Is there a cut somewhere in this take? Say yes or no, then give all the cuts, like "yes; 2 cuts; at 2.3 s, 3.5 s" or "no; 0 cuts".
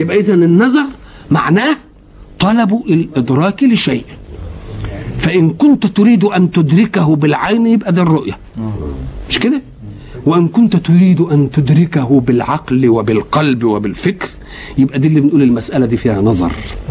no; 0 cuts